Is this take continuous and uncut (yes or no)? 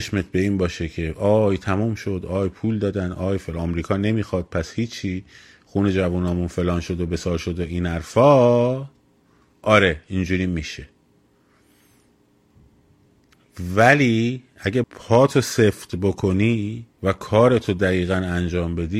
no